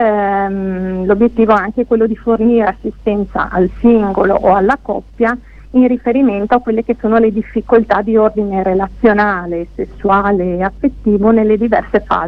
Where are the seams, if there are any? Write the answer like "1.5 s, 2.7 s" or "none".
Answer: none

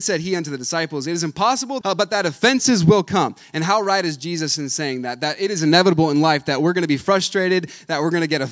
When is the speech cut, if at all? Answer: 1.8 s

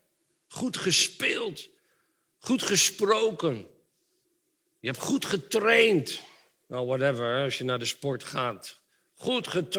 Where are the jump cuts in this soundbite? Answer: none

